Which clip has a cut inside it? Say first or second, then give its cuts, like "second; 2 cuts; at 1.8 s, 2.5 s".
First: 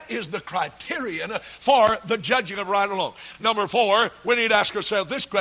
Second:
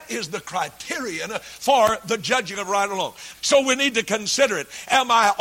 second; 1 cut; at 3.3 s